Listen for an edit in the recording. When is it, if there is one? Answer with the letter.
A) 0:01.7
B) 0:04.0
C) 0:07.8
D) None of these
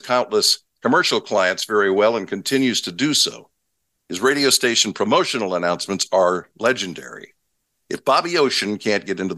D